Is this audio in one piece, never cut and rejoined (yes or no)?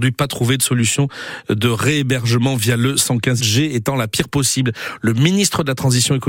no